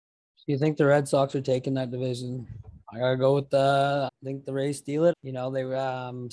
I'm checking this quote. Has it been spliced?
yes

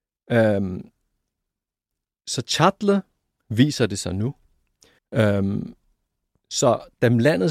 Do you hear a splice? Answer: yes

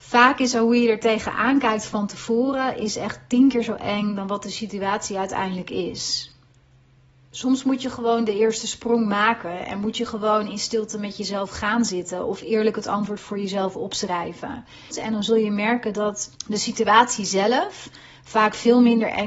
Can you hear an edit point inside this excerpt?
yes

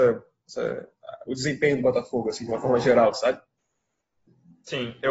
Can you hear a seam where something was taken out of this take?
no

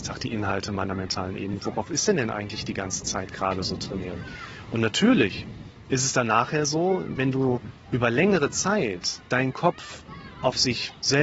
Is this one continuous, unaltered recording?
no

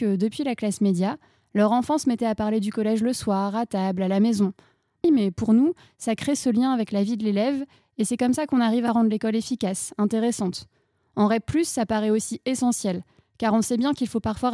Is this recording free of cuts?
no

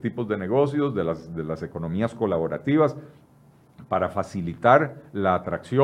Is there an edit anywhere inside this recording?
no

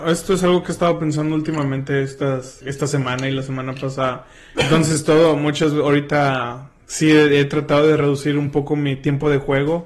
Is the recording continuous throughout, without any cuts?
no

